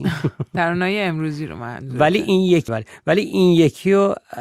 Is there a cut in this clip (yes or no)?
yes